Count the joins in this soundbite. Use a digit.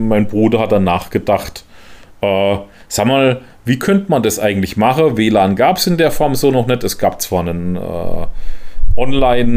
0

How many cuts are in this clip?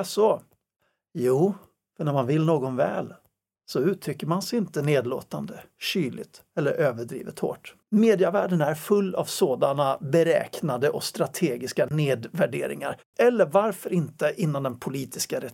2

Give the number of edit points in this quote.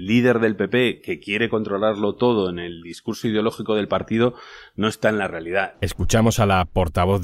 1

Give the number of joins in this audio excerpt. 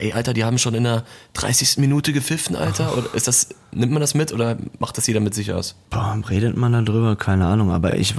0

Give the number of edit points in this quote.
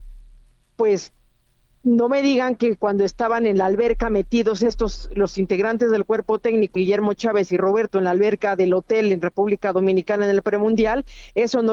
1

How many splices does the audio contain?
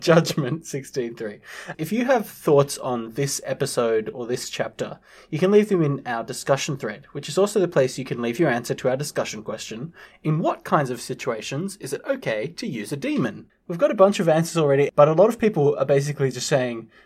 2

